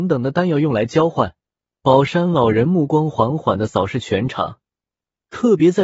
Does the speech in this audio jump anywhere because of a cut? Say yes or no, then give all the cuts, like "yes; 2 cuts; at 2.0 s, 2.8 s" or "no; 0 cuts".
yes; 1 cut; at 1.7 s